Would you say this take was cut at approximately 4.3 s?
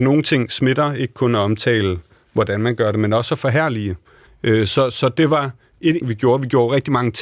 yes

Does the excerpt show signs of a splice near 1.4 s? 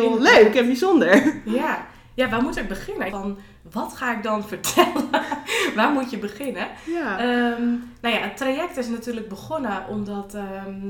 no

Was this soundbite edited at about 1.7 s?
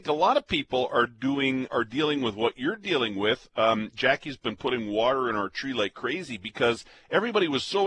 yes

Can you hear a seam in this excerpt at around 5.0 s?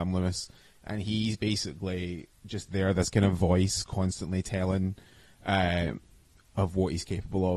no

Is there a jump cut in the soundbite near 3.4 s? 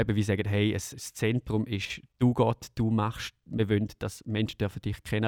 no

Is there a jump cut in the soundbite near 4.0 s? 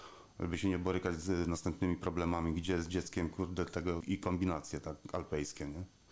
yes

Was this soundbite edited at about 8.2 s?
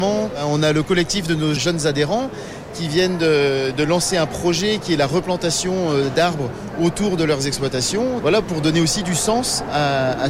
yes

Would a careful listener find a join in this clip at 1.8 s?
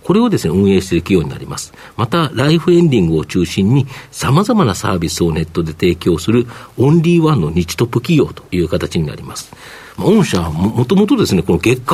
no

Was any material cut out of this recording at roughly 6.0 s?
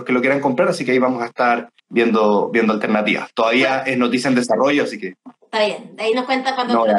no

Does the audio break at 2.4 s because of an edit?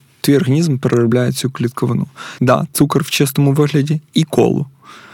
yes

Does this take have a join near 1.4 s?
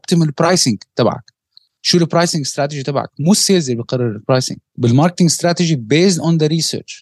no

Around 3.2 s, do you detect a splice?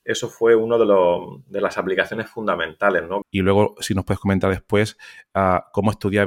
yes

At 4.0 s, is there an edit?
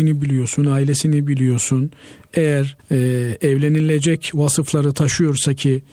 no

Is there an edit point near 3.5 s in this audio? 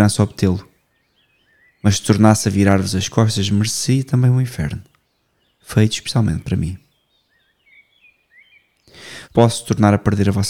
no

